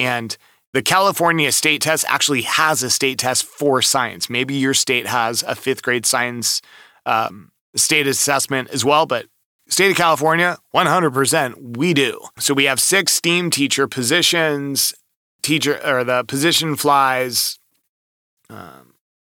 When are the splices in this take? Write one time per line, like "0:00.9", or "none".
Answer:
0:12.4